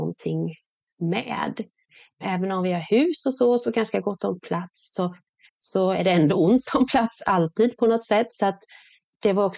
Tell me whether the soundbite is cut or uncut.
uncut